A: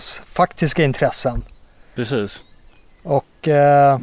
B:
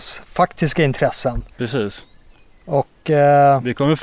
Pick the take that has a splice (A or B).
B